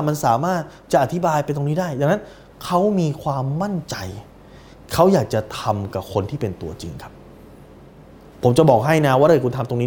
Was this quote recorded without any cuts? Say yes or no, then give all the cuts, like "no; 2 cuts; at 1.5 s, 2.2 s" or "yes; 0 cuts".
yes; 0 cuts